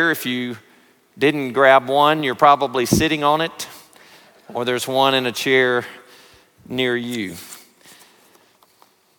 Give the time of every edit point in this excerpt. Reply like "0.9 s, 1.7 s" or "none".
none